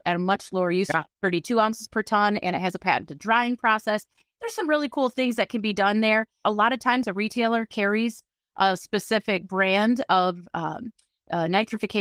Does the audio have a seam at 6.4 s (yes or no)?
yes